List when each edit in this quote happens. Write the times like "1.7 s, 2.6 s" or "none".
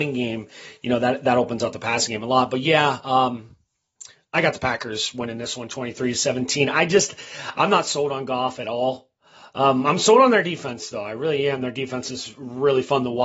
none